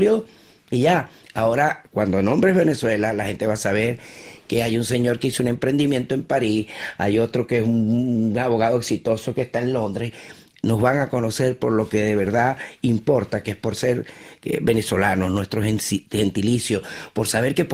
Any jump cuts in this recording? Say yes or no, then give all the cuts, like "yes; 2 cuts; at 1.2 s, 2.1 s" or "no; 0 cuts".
no; 0 cuts